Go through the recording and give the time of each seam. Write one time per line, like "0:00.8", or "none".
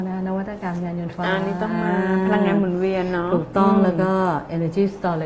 0:01.1